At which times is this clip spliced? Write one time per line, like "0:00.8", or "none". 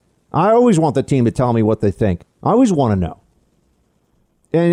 0:02.2